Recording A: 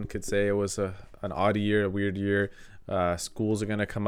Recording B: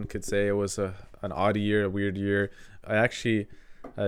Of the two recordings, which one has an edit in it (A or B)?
B